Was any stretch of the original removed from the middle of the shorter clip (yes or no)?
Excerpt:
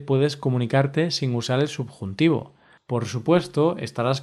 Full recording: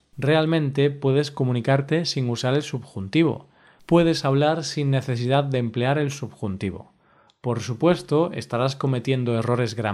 yes